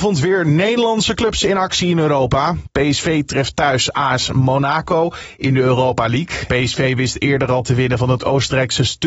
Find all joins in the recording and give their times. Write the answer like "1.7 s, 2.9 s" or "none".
6.5 s